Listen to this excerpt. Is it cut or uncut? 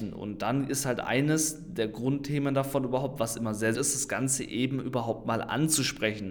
cut